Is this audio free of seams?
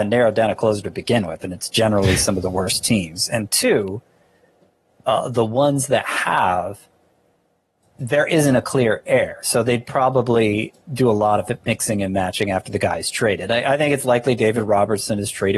yes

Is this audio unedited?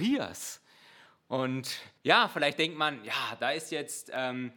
no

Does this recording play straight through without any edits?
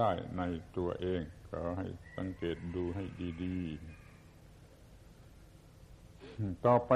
yes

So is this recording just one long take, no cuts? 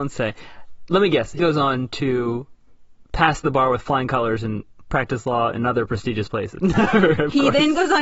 no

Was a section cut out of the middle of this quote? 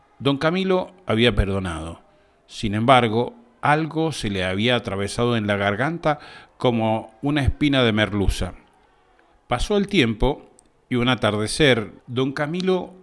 yes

